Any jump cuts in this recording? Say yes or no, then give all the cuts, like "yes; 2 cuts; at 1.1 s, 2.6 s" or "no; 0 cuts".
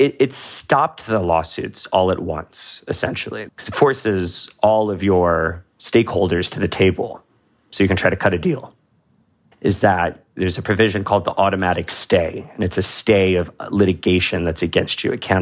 yes; 2 cuts; at 3.5 s, 9.5 s